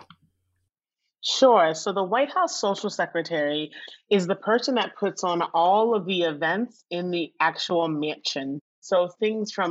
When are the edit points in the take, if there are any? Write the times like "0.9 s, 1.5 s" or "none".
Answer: none